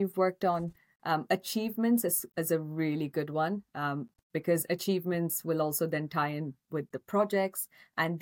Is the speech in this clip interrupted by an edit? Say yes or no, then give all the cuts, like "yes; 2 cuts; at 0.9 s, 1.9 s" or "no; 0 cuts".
no; 0 cuts